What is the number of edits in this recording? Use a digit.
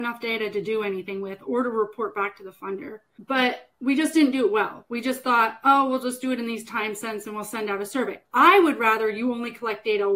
0